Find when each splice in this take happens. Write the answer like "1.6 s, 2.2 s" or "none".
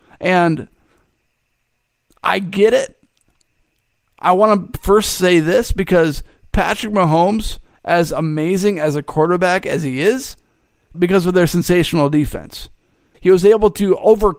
10.9 s, 13.1 s